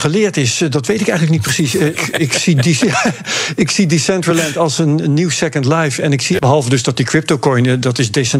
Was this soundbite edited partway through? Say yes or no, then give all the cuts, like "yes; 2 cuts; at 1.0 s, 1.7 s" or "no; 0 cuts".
yes; 2 cuts; at 1.9 s, 6.4 s